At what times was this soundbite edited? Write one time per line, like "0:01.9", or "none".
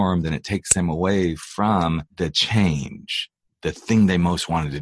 0:02.1

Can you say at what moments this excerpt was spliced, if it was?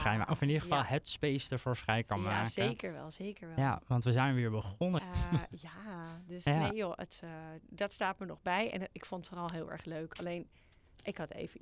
0:05.0

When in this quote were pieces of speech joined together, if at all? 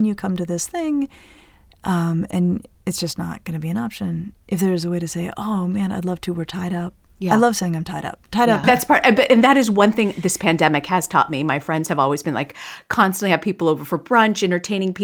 0:08.6

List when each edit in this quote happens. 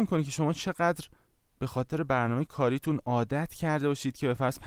none

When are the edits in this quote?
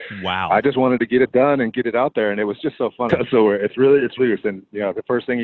0:03.1
0:04.2

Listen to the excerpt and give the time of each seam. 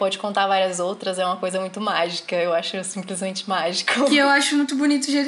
none

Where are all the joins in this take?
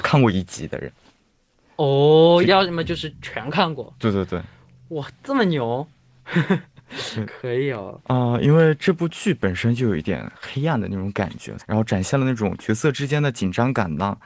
0:02.4
0:08.0
0:11.6

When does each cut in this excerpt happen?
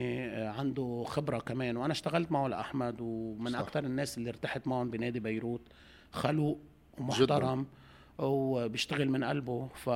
none

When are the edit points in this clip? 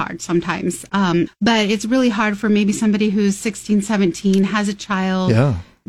0:01.3

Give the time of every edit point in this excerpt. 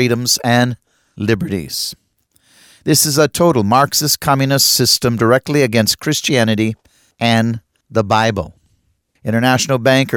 none

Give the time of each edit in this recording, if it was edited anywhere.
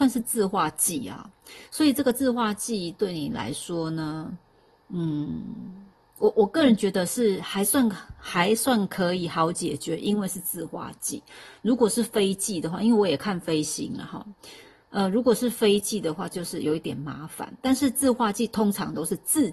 none

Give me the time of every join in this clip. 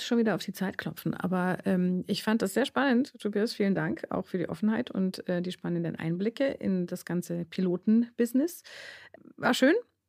none

